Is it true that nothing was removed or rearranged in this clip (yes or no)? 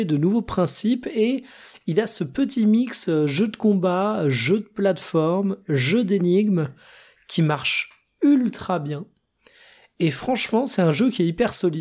yes